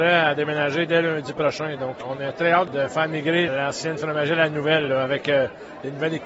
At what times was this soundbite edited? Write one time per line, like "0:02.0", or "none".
none